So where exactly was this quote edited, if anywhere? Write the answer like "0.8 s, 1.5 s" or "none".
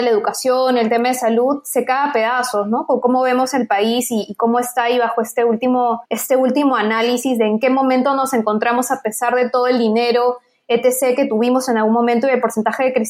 6.1 s